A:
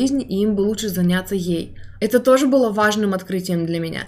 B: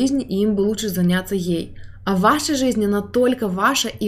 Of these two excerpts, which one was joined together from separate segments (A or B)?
A